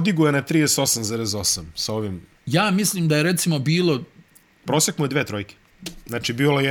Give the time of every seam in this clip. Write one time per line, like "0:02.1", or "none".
none